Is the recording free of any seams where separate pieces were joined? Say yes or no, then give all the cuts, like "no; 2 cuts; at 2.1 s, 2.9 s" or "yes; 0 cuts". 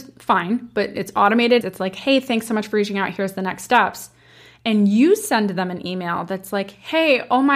no; 1 cut; at 1.6 s